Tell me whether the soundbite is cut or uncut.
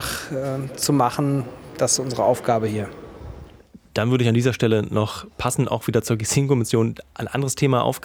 uncut